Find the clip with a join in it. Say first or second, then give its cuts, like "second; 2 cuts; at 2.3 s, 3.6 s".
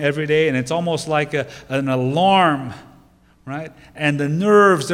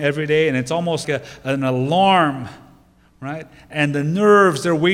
second; 1 cut; at 1.0 s